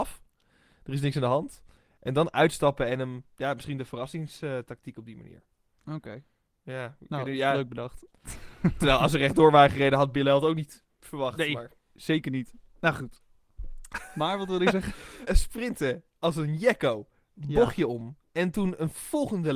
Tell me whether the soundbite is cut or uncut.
cut